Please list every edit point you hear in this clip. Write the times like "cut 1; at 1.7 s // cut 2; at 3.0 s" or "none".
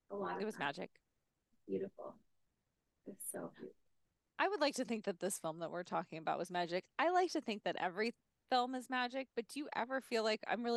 none

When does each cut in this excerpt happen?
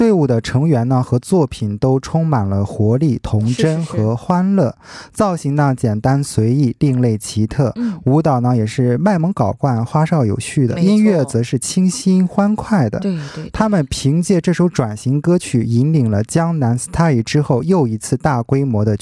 none

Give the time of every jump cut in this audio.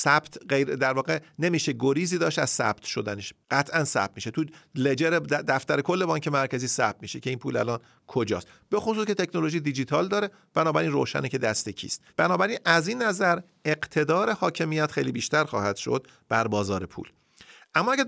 cut 1; at 3.4 s // cut 2; at 12.1 s

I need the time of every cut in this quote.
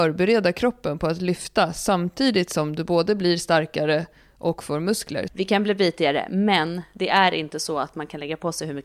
cut 1; at 5.3 s

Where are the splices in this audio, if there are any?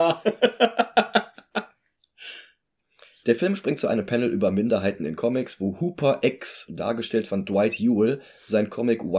none

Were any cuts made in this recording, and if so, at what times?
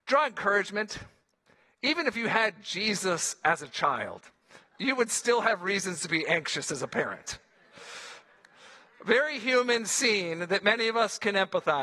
none

